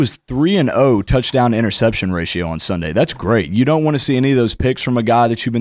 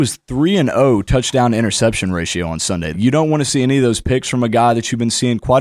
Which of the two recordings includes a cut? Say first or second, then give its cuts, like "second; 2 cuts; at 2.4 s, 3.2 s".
second; 1 cut; at 2.9 s